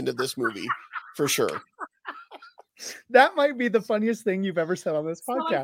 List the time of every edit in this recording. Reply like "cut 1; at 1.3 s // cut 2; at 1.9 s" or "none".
none

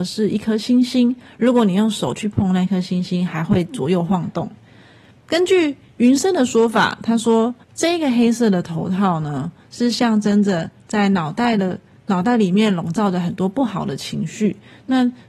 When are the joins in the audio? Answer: cut 1; at 5.1 s // cut 2; at 7.6 s

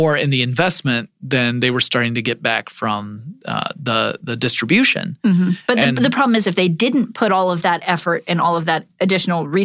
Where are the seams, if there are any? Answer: none

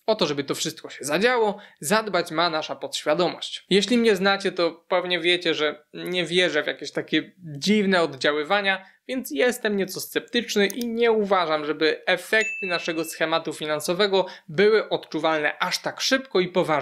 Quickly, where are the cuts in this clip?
none

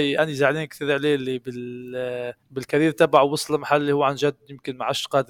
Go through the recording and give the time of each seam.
cut 1; at 2.4 s

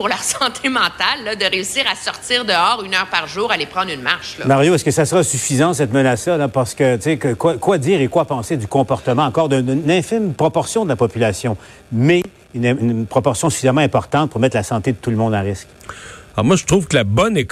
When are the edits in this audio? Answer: cut 1; at 16.3 s

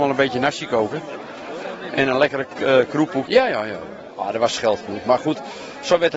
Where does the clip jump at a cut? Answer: cut 1; at 3.3 s

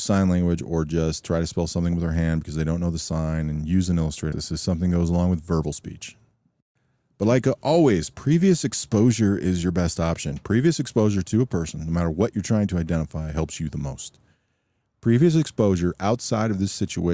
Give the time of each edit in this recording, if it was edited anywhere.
cut 1; at 4.3 s

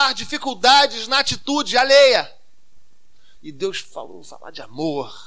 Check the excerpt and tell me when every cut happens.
cut 1; at 3.4 s

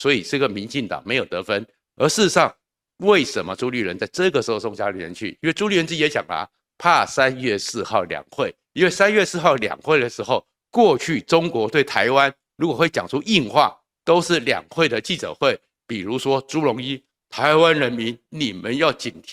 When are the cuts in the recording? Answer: none

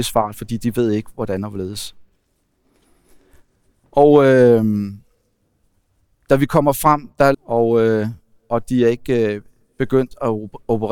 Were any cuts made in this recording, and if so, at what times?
cut 1; at 3.8 s // cut 2; at 7.3 s

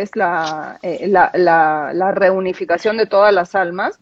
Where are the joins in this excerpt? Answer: none

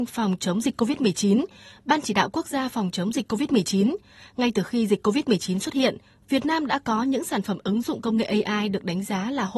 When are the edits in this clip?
none

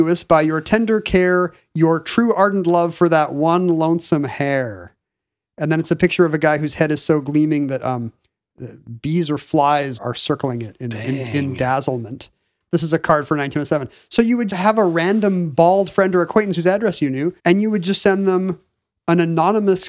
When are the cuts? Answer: cut 1; at 10.0 s // cut 2; at 14.5 s // cut 3; at 17.4 s

